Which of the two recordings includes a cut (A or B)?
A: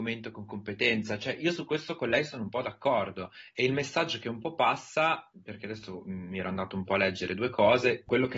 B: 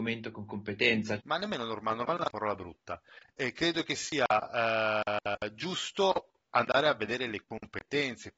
B